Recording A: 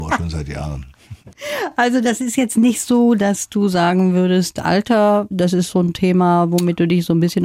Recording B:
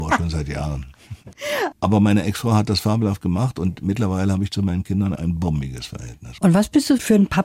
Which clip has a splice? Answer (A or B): B